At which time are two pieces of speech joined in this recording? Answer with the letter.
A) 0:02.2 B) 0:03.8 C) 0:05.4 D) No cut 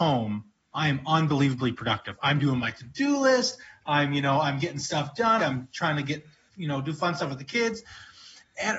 C